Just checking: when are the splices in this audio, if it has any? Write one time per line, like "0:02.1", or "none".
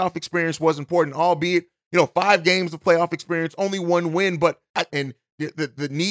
0:04.9